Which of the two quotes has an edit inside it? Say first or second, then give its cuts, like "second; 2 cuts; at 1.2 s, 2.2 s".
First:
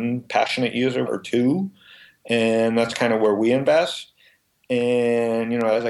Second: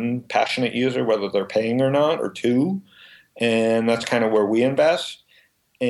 first; 1 cut; at 1.1 s